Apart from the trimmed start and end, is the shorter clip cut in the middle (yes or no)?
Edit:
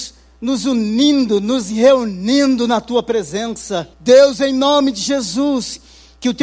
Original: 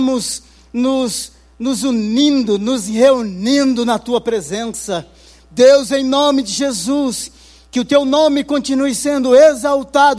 yes